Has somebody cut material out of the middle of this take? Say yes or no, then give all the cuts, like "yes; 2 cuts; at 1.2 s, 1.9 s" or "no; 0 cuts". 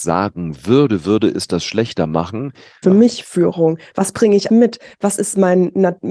yes; 2 cuts; at 2.8 s, 4.5 s